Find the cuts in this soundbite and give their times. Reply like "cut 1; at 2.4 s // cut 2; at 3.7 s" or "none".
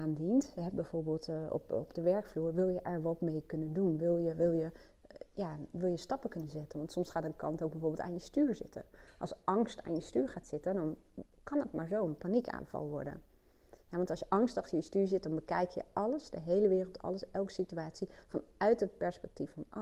cut 1; at 6.7 s

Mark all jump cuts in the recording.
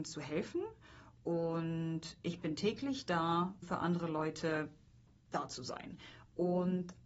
cut 1; at 3.6 s

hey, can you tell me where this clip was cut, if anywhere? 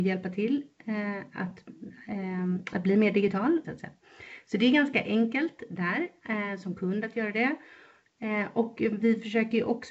cut 1; at 3.6 s

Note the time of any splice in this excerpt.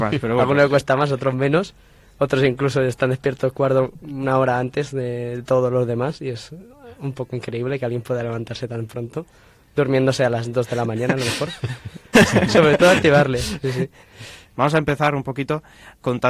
cut 1; at 12.1 s // cut 2; at 14.5 s

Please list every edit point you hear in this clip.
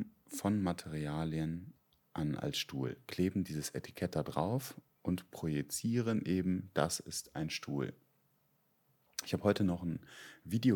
none

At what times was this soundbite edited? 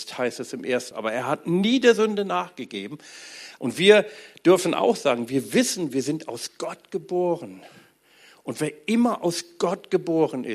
cut 1; at 0.9 s // cut 2; at 3.6 s

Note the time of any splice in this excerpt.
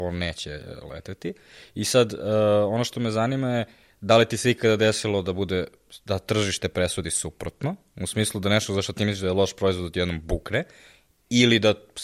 none

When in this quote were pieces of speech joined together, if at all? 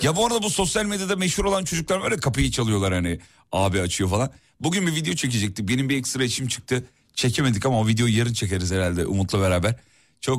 none

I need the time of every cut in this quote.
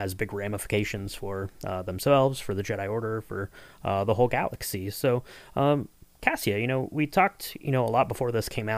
none

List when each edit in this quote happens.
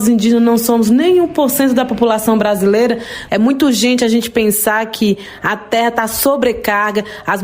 cut 1; at 3.3 s

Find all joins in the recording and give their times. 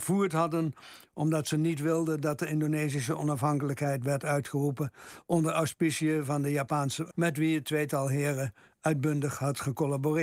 cut 1; at 7.1 s

